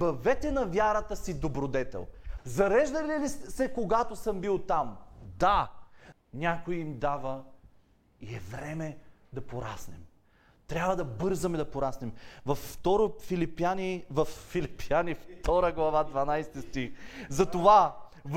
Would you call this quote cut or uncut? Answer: cut